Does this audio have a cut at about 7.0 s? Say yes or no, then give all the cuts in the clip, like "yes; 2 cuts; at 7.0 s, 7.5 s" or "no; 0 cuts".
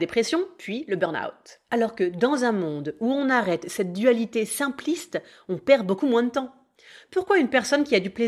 no; 1 cut; at 1.6 s